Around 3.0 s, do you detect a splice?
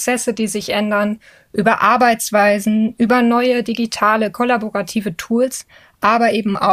no; 0 cuts

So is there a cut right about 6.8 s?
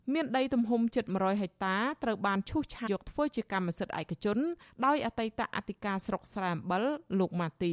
no; 1 cut; at 2.9 s

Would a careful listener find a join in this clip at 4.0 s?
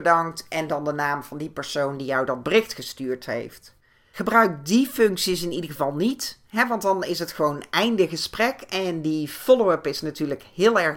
no; 0 cuts

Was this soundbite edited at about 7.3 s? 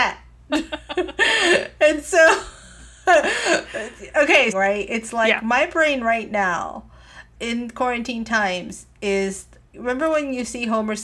yes; 2 cuts; at 4.5 s, 7.3 s

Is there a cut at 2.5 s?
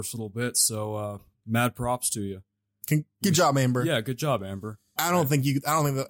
no; 1 cut; at 5.0 s

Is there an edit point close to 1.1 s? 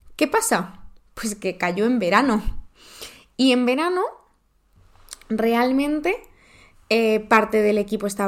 no; 0 cuts

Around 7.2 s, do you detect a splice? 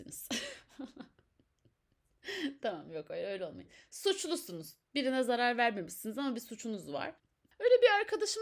yes; 1 cut; at 7.2 s

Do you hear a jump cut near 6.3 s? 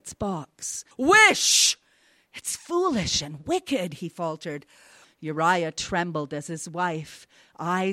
no; 2 cuts; at 0.9 s, 5.0 s

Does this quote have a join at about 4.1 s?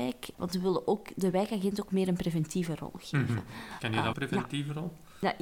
yes; 1 cut; at 4.1 s

